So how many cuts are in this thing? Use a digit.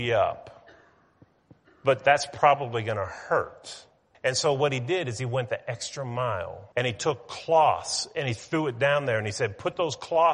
2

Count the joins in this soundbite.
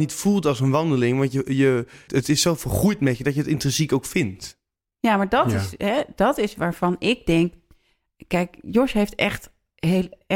1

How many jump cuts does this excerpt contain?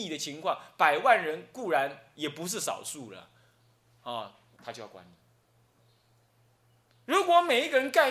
1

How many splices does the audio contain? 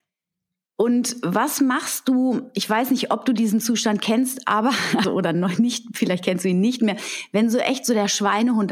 1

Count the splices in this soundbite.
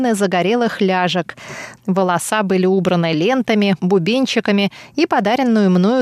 2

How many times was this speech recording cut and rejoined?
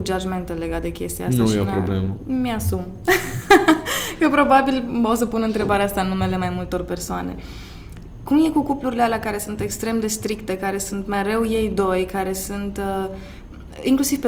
0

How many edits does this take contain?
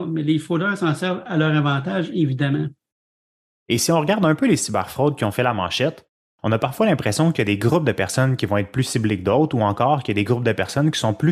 0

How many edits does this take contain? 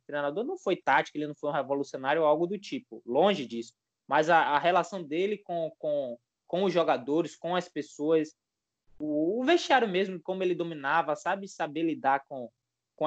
0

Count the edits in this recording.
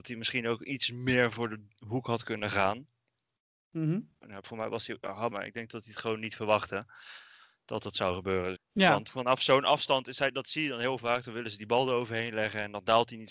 3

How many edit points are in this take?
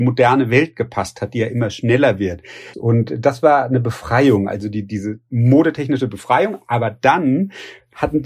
1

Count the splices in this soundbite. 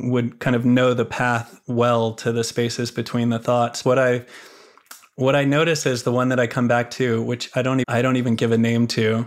2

